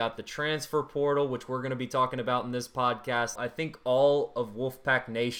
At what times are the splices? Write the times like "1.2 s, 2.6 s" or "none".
3.4 s